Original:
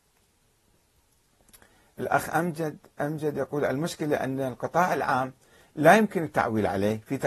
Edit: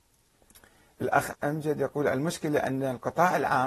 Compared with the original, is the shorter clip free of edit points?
no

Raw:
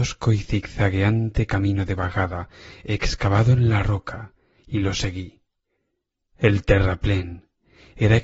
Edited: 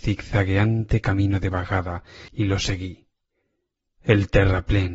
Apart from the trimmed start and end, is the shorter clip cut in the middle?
yes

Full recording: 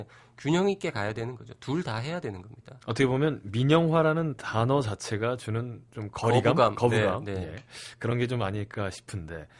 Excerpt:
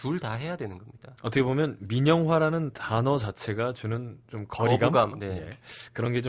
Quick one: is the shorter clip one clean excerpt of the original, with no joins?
no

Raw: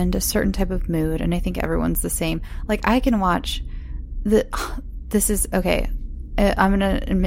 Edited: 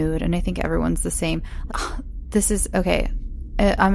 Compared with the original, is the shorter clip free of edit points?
no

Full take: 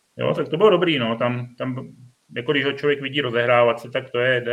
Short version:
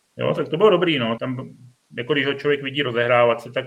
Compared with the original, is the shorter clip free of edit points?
no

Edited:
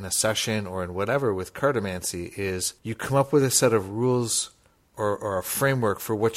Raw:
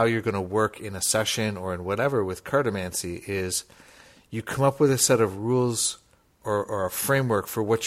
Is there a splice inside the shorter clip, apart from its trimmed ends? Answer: yes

